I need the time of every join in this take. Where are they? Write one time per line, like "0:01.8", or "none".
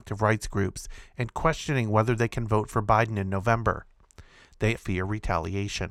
0:04.8